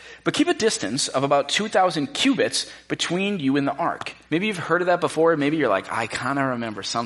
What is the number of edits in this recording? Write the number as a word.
one